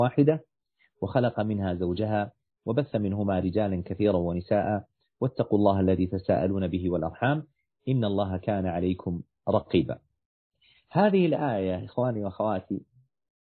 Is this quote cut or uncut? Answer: uncut